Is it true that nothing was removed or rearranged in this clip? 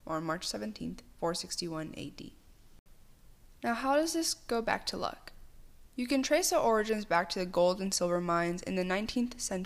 yes; 0 cuts

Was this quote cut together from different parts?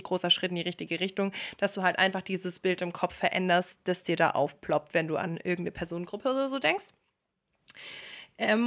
no; 0 cuts

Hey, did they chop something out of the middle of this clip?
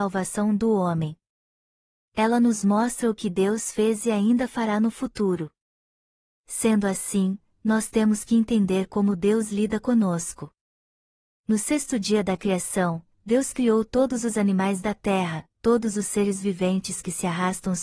no; 0 cuts

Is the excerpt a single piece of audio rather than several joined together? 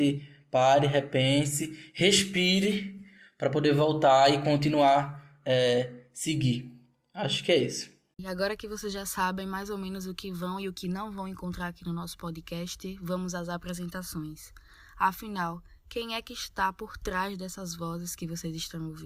yes; 0 cuts

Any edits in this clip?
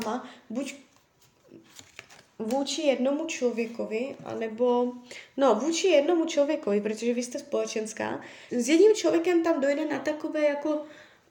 yes; 1 cut; at 8.5 s

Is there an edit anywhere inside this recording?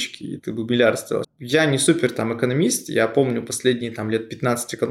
yes; 1 cut; at 1.2 s

